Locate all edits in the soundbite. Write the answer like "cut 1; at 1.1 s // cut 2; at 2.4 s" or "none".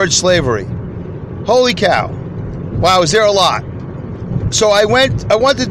cut 1; at 4.5 s